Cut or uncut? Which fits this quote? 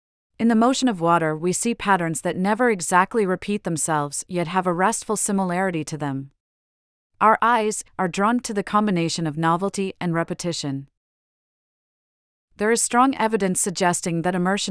cut